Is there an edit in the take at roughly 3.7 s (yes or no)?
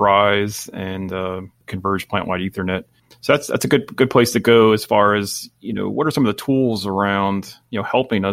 no